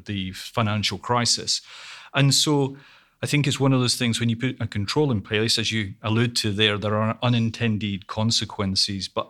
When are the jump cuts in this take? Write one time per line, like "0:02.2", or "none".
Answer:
none